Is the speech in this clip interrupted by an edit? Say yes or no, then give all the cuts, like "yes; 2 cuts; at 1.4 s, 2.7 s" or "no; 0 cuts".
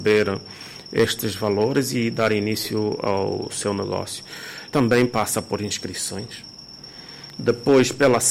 yes; 1 cut; at 4.7 s